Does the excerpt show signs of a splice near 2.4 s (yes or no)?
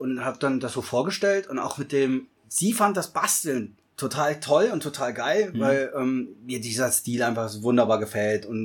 yes